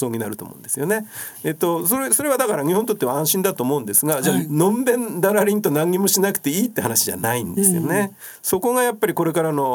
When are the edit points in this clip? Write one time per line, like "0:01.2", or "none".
none